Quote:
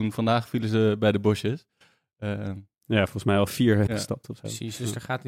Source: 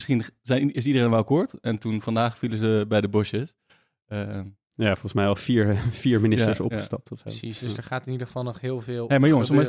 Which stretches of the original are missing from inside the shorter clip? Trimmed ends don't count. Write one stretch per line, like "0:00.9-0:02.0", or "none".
0:05.8-0:06.7